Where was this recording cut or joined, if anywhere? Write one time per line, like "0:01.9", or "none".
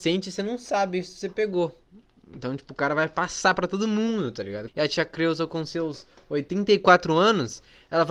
0:04.7